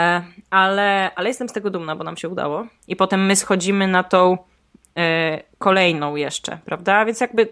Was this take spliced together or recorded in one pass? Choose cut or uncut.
cut